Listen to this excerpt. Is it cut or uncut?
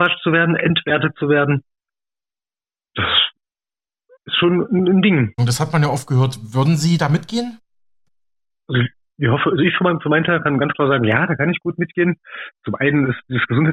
cut